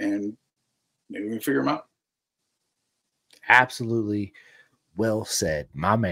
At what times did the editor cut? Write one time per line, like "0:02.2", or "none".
0:03.3